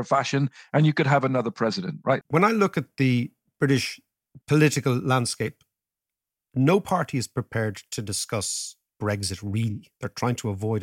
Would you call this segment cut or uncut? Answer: cut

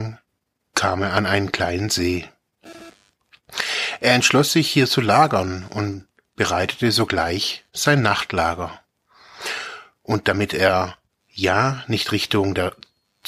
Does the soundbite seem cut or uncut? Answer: uncut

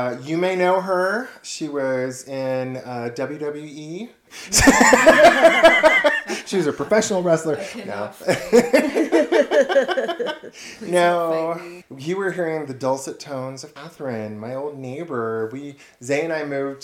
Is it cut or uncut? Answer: uncut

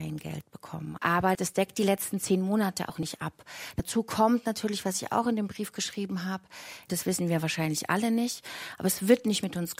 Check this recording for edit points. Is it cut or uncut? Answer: cut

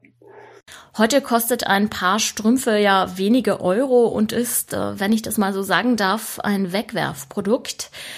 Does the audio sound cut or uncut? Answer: uncut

